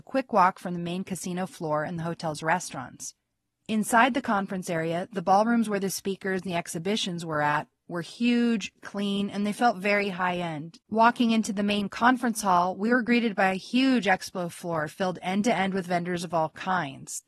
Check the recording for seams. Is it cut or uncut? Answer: cut